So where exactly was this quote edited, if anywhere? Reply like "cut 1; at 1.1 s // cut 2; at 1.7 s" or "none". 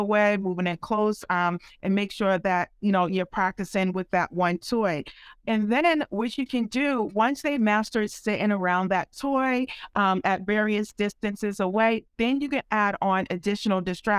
none